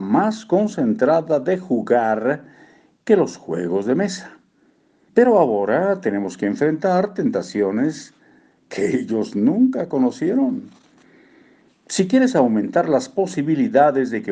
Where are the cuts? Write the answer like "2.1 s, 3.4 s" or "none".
5.1 s